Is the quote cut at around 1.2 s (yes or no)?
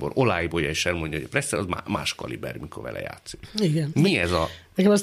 no